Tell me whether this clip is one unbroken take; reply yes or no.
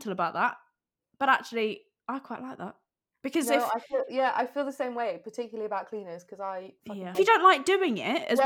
no